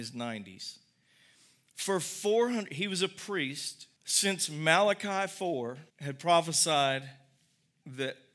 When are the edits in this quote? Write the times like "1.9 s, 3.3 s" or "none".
4.0 s, 5.9 s

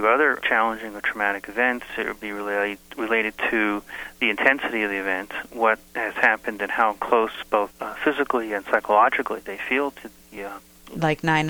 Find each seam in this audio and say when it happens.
none

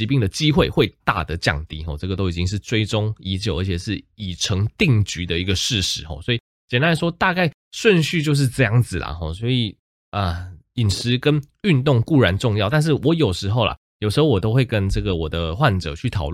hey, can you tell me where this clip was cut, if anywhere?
1.0 s

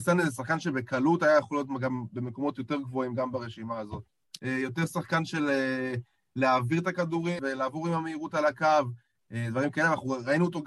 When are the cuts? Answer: 4.4 s, 7.4 s

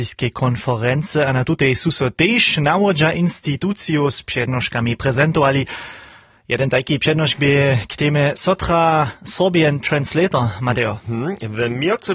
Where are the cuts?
none

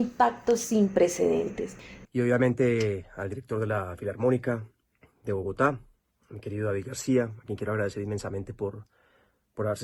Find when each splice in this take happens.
2.0 s

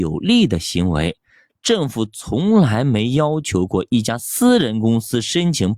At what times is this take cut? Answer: 1.5 s

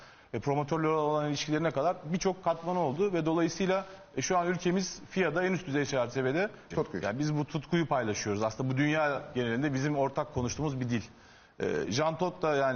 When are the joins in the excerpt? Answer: 6.7 s

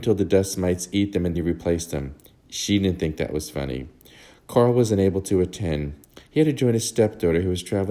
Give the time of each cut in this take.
1.3 s

